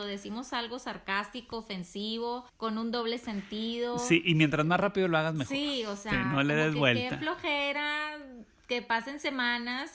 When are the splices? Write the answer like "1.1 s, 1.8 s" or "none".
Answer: 2.5 s